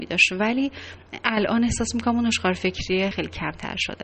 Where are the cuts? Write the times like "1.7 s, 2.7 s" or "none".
3.1 s